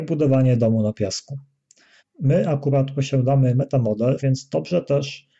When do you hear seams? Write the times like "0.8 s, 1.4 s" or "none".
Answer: 2.0 s, 4.2 s